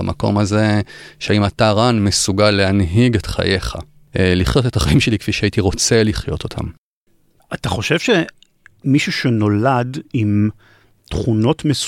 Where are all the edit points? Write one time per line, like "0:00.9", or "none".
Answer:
none